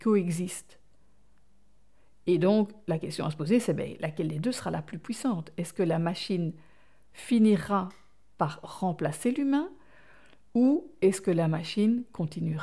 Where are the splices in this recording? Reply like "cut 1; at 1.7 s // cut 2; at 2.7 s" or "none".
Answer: none

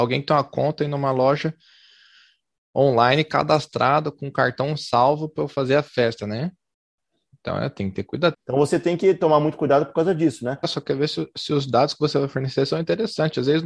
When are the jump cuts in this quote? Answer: cut 1; at 8.3 s

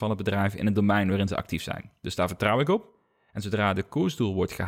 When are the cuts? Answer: none

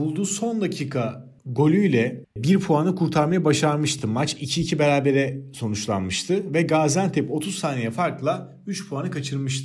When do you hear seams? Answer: none

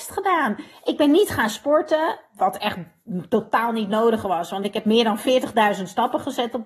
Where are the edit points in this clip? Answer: none

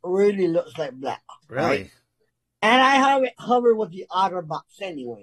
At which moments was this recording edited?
cut 1; at 1.4 s

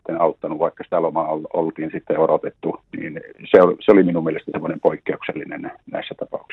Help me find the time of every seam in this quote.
cut 1; at 2.9 s

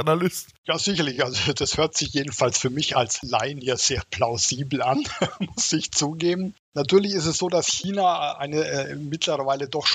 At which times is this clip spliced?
none

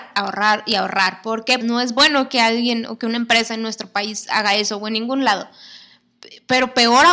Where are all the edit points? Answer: cut 1; at 1.6 s

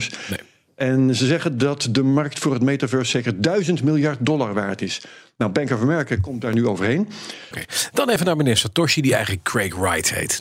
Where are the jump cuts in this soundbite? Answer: cut 1; at 7.5 s

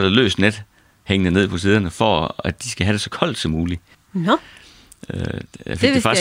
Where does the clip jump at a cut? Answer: cut 1; at 3.9 s

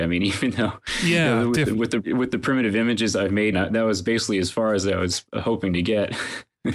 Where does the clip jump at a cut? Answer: cut 1; at 2.0 s // cut 2; at 3.5 s

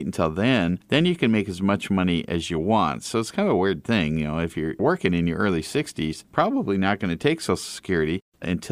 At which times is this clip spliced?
none

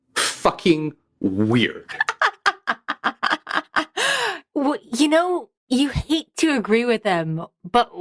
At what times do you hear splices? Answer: cut 1; at 5.6 s

